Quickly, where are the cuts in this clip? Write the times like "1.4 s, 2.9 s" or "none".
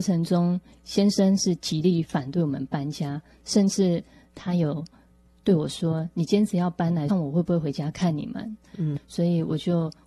7.1 s, 9.0 s